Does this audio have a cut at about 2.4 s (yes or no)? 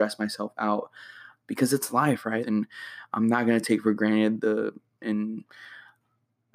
yes